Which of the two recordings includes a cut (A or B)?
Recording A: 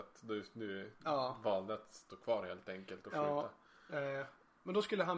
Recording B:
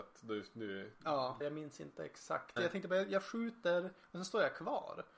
B